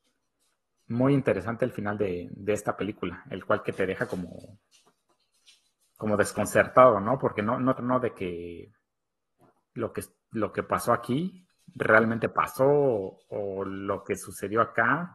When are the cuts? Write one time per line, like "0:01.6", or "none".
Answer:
0:07.8